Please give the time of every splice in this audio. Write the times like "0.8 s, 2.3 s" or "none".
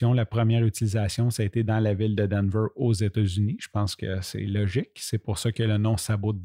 none